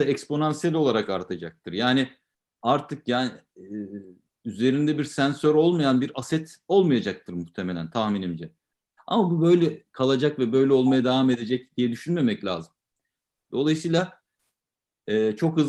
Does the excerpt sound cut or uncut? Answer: cut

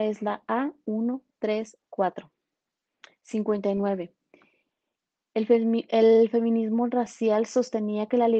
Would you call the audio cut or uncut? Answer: cut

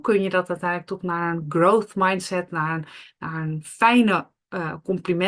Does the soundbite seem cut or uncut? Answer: uncut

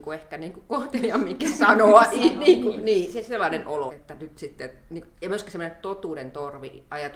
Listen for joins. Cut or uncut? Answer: cut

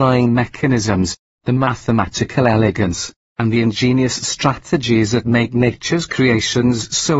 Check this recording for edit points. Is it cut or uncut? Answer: uncut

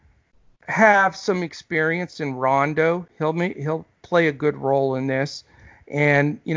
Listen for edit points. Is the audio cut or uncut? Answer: uncut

